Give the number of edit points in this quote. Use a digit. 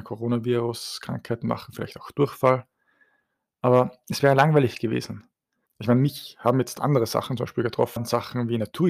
2